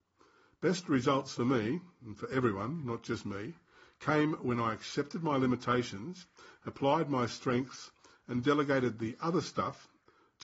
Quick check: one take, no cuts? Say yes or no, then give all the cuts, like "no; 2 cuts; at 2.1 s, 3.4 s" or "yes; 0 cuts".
yes; 0 cuts